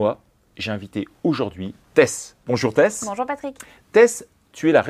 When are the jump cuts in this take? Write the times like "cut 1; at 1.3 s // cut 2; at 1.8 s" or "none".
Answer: cut 1; at 1.8 s